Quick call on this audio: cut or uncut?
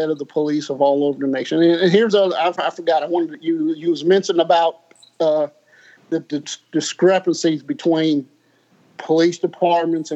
uncut